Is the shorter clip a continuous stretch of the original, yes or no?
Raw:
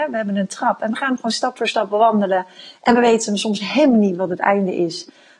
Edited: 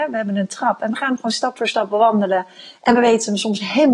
yes